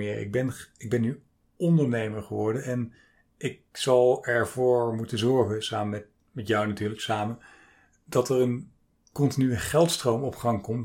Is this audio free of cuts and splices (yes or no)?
yes